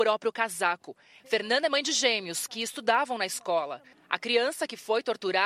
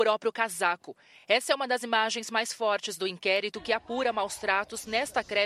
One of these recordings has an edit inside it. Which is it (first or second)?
first